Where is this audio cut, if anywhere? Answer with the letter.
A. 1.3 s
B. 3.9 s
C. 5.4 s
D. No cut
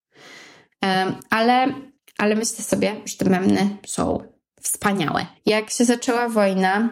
C